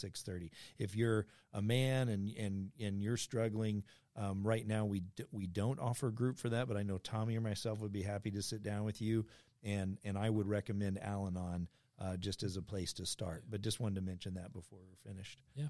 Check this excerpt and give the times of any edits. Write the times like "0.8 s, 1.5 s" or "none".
none

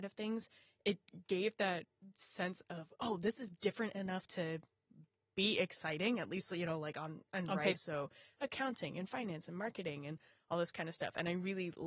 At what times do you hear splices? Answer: 7.7 s

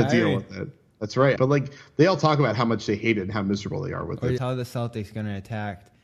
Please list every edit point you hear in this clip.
1.4 s, 4.4 s

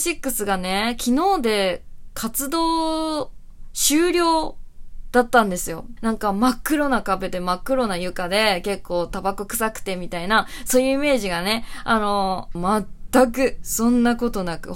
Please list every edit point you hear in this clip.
6.0 s, 12.5 s

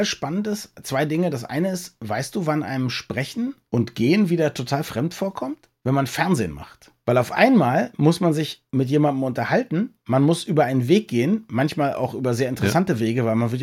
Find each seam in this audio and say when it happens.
none

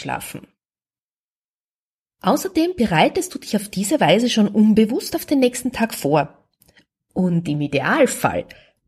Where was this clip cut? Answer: none

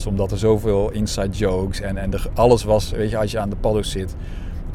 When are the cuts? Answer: none

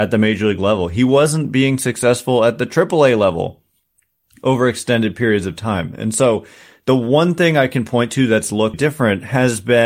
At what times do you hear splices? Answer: 8.7 s

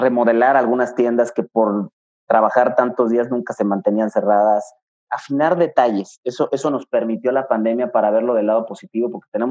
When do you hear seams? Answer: 6.5 s

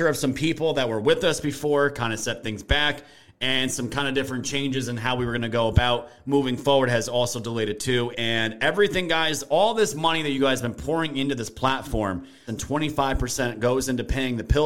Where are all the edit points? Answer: 8.1 s, 12.5 s

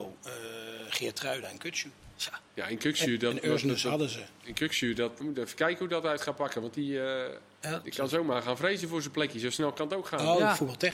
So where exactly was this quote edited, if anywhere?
5.2 s, 7.8 s

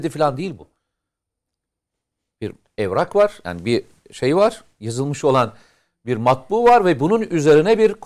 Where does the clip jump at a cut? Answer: none

